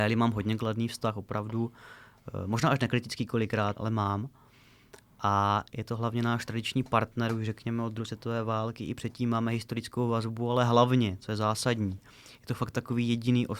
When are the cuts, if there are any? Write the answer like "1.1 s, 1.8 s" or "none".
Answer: 3.7 s